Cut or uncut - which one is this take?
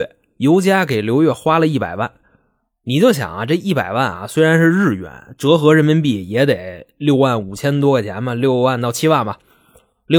uncut